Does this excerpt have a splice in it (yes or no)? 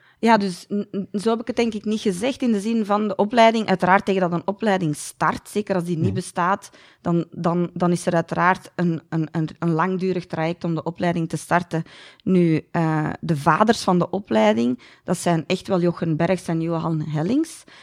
no